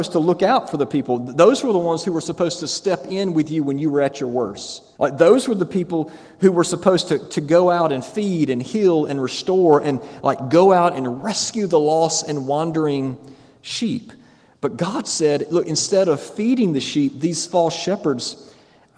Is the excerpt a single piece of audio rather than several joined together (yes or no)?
no